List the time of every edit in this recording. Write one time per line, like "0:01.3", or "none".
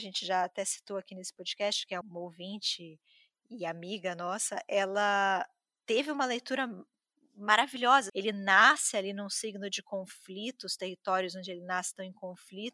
0:02.0
0:08.1